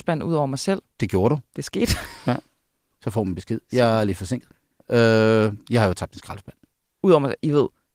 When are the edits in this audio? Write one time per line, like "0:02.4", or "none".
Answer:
none